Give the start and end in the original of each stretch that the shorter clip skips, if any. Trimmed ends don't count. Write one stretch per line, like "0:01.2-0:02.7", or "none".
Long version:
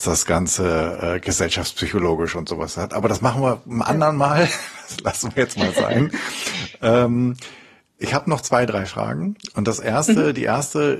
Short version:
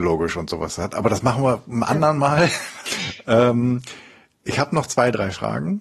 0:04.8-0:06.4